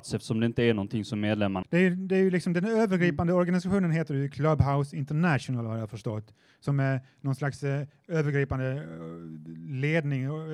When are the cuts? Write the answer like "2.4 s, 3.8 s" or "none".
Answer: 1.6 s